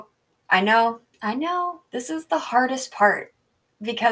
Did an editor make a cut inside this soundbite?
yes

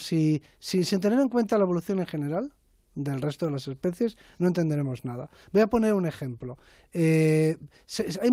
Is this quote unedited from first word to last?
yes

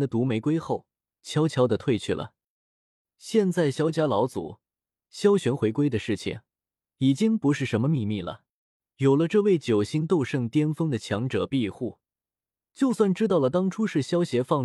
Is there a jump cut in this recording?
no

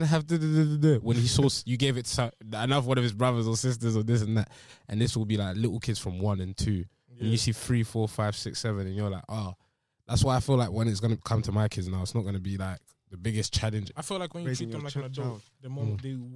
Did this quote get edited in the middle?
yes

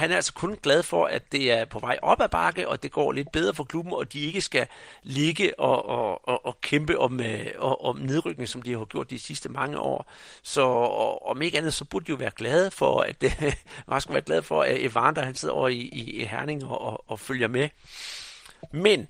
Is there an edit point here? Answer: no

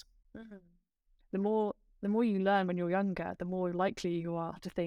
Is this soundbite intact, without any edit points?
no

